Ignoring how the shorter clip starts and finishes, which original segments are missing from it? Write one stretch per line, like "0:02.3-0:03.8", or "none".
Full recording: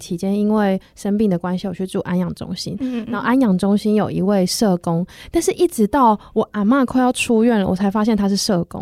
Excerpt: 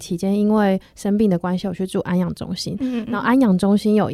none